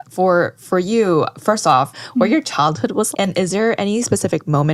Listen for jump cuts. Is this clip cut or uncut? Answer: cut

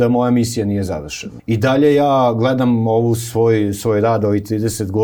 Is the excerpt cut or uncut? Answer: cut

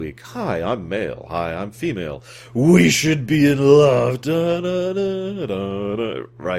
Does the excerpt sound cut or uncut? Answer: uncut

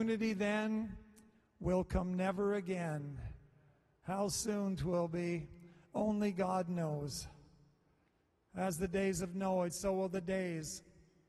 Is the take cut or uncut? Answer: cut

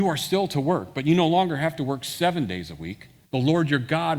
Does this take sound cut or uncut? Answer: cut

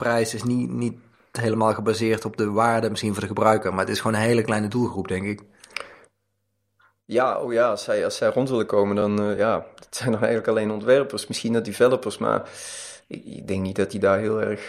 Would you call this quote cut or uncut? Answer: uncut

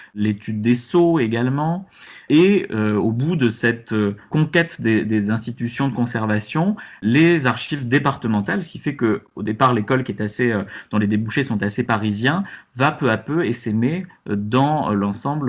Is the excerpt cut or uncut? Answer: uncut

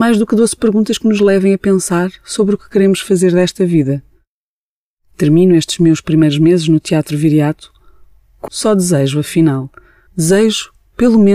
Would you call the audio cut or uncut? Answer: cut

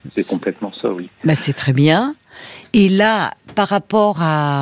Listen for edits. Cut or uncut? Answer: uncut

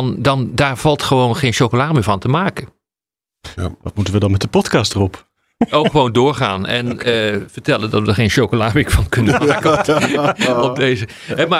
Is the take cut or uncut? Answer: uncut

